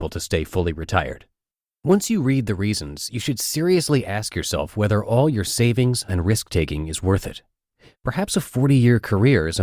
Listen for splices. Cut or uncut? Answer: cut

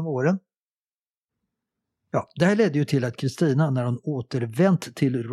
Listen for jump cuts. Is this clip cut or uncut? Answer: uncut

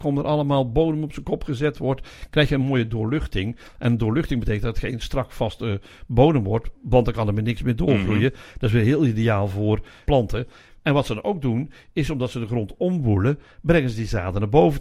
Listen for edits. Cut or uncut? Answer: uncut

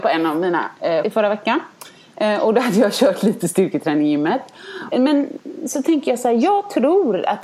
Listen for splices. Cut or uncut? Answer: cut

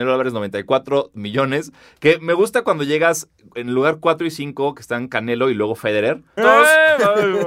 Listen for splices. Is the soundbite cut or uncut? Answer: cut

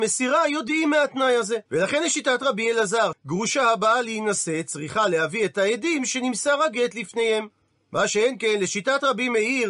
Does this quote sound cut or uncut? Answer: cut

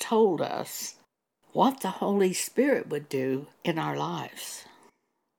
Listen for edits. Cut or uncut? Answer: cut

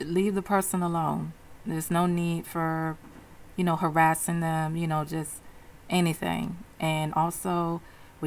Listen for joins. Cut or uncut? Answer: uncut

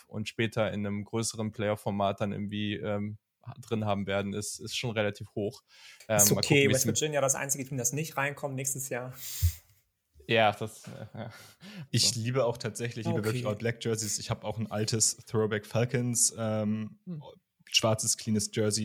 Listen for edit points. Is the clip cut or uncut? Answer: cut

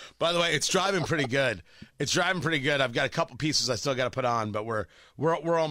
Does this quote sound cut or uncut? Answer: uncut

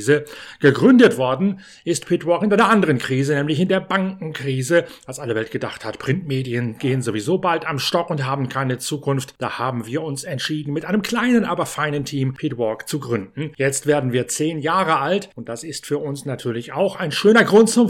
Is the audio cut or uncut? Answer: uncut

